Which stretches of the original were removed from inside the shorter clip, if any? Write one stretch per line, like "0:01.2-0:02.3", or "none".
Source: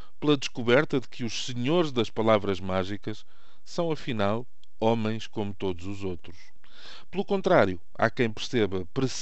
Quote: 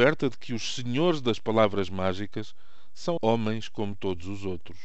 0:03.9-0:04.8

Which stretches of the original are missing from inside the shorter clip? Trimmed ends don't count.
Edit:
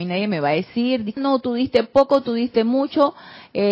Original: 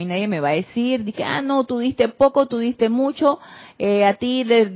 0:01.2-0:01.4

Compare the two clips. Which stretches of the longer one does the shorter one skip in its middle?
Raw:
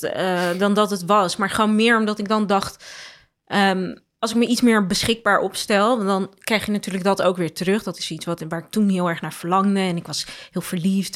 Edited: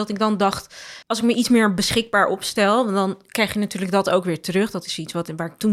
0:03.1-0:04.1

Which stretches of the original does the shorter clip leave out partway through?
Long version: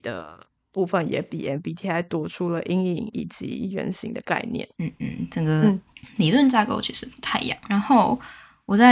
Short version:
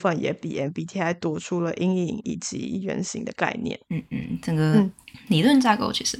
none

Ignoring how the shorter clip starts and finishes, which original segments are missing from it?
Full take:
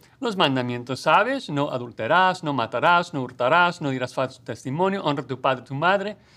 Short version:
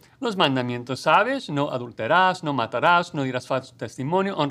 0:03.1-0:03.8

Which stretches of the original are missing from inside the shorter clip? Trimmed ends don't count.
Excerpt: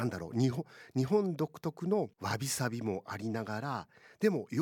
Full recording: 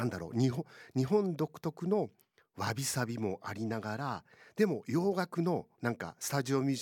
0:02.1-0:02.5

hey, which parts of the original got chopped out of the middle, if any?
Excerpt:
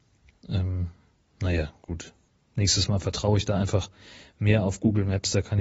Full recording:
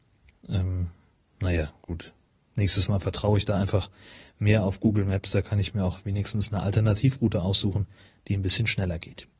none

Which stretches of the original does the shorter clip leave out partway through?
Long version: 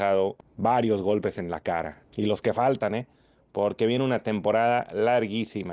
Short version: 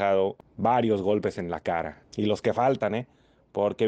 none

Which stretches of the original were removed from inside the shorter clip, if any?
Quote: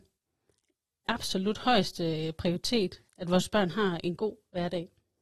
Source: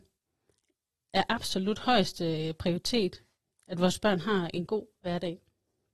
0:01.1-0:01.3
0:03.3-0:03.6

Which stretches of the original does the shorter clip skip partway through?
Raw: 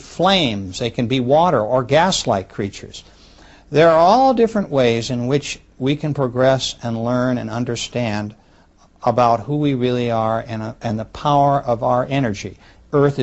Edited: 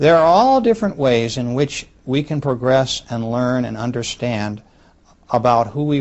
none

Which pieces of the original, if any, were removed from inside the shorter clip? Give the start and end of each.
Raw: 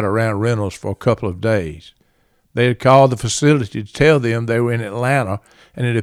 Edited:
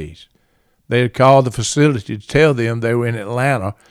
none

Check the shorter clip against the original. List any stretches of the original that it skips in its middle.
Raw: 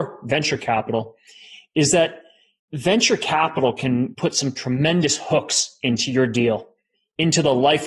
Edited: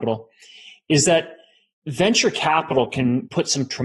none

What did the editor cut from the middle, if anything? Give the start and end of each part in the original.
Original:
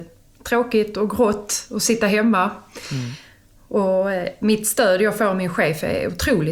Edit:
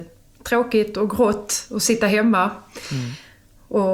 none

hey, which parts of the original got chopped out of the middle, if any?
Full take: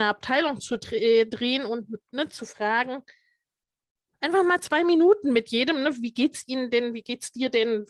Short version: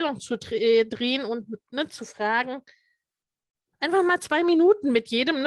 none

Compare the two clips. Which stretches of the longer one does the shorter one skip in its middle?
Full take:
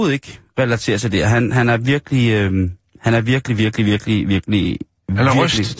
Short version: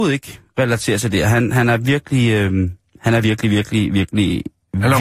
0:03.2-0:03.6

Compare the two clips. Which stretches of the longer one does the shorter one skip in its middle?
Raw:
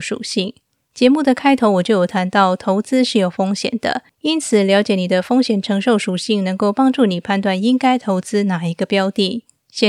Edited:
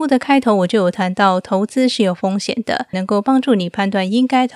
0:04.1-0:06.4

